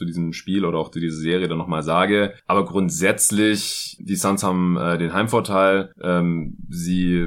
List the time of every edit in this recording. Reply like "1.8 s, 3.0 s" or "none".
none